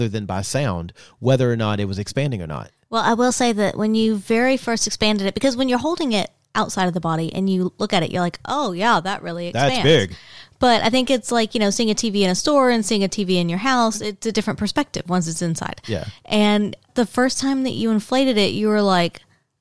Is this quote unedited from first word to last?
yes; 0 cuts

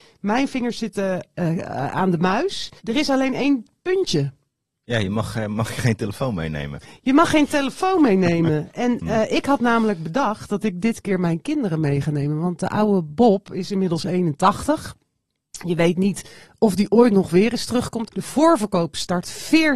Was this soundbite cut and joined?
yes; 2 cuts; at 2.8 s, 18.1 s

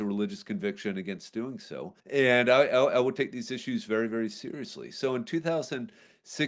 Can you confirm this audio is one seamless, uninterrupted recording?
no; 1 cut; at 2.0 s

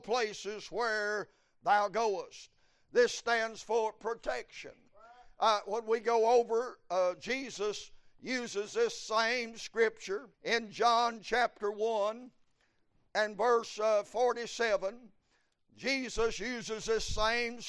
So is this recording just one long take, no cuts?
no; 1 cut; at 10.3 s

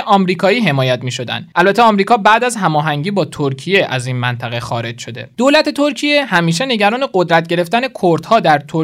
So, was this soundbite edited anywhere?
no; 0 cuts

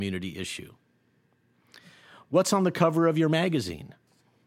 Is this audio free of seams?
yes; 0 cuts

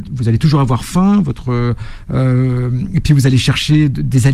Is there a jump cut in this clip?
no; 0 cuts

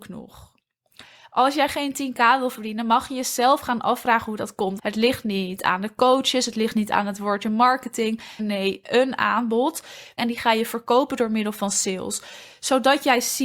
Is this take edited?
yes; 3 cuts; at 4.8 s, 8.4 s, 10.2 s

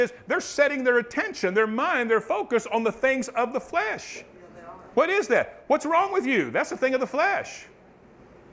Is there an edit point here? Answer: no; 0 cuts

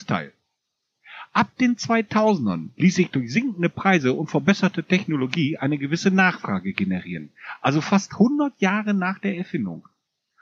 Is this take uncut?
yes; 0 cuts

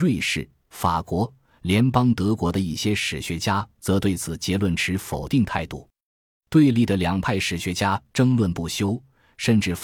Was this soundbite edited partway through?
no; 0 cuts

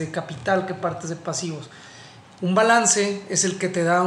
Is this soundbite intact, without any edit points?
no; 1 cut; at 2.2 s

